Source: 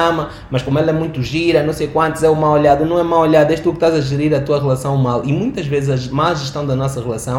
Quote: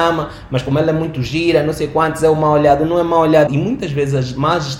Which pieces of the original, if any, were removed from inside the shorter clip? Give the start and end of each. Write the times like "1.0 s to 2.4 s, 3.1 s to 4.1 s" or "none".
3.5 s to 5.2 s